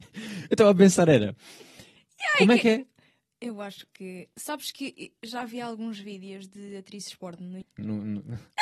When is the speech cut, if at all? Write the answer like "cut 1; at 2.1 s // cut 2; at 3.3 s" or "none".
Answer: cut 1; at 2.0 s // cut 2; at 7.6 s

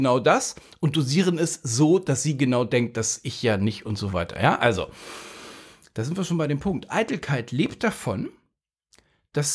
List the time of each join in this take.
none

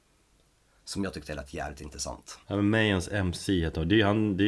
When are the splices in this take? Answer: cut 1; at 2.4 s

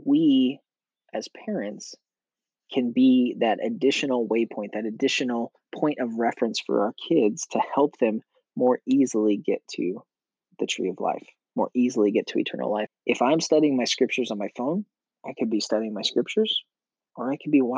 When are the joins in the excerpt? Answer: cut 1; at 12.9 s

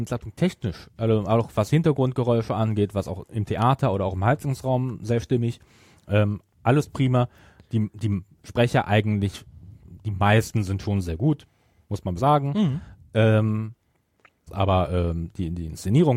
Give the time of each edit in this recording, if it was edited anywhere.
cut 1; at 12.2 s // cut 2; at 14.5 s

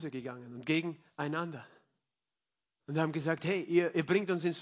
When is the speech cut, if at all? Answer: none

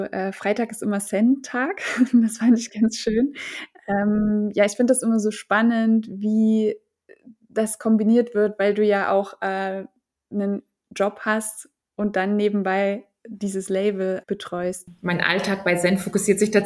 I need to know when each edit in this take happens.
cut 1; at 14.2 s

